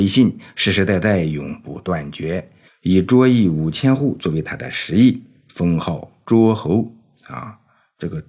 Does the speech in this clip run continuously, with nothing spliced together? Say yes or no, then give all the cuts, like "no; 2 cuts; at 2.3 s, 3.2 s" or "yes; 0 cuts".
yes; 0 cuts